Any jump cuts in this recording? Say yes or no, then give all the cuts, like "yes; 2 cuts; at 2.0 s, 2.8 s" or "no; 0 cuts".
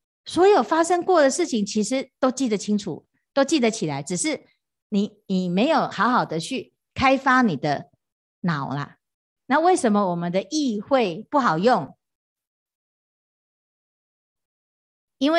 no; 0 cuts